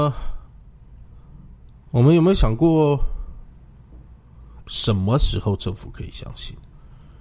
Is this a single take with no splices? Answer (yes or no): no